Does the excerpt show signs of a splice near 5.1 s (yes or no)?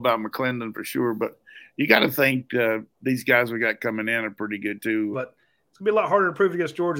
yes